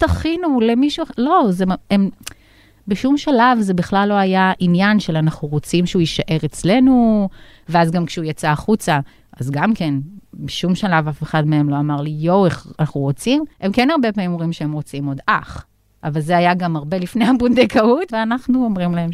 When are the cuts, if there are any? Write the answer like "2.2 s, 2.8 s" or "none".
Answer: 13.5 s, 18.1 s